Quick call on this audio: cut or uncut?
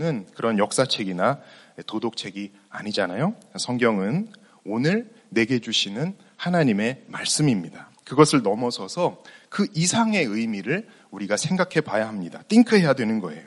cut